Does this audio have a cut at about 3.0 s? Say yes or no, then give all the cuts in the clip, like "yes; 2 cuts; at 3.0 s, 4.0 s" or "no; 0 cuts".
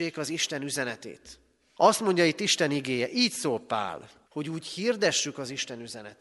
no; 2 cuts; at 1.8 s, 4.3 s